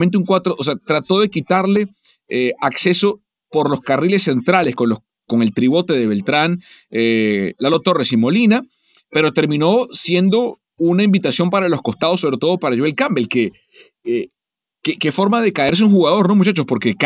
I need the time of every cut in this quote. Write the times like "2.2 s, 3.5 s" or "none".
none